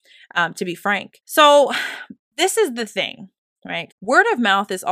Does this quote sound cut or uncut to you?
cut